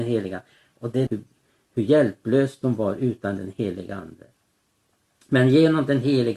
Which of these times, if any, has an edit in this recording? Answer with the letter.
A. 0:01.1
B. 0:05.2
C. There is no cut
A